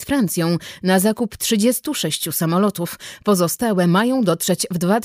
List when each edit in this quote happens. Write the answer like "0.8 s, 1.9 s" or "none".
none